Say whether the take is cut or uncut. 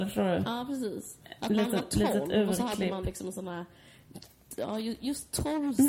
uncut